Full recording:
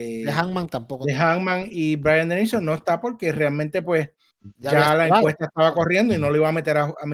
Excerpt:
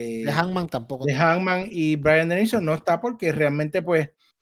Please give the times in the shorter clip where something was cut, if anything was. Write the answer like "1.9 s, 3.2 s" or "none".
none